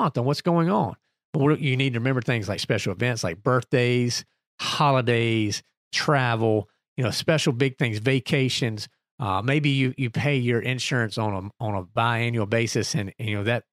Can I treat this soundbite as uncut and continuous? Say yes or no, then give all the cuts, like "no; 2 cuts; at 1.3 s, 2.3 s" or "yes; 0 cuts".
yes; 0 cuts